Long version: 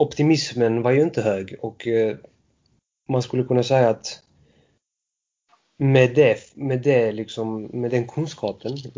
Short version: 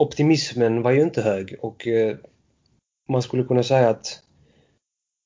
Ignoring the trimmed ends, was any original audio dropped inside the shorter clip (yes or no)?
no